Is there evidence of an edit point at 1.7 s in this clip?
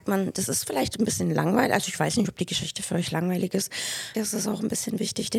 no; 1 cut; at 4.1 s

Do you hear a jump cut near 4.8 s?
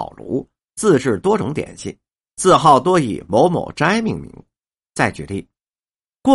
yes; 1 cut; at 4.8 s

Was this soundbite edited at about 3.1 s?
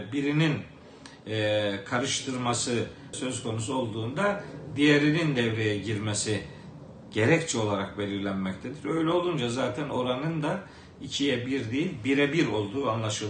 yes; 1 cut; at 3.1 s

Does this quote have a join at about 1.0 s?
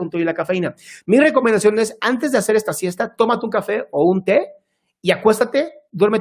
yes; 1 cut; at 1.0 s

